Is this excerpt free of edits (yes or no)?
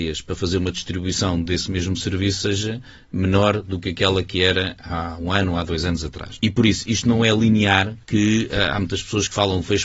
no